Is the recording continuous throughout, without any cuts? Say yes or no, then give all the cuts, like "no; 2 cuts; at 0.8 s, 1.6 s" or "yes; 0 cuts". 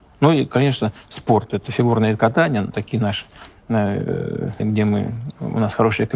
no; 2 cuts; at 2.7 s, 4.6 s